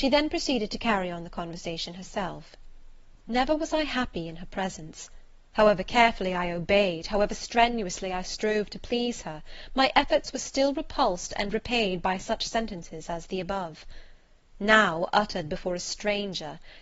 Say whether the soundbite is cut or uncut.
cut